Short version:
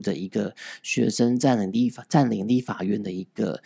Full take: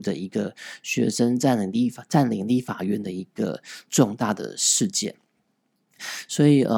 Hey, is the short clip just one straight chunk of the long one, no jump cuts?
yes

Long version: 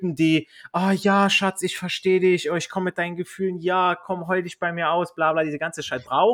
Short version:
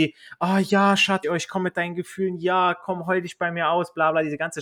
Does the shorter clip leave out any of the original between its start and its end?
yes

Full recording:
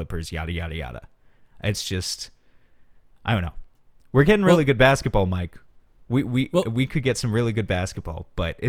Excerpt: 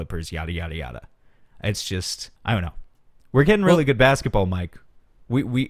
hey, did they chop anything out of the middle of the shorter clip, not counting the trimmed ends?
yes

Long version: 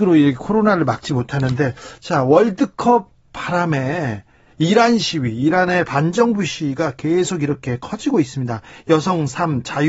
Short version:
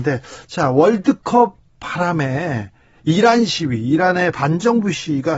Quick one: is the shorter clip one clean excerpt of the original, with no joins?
yes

